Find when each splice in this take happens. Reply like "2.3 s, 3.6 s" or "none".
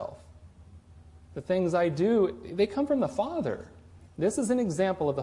4.1 s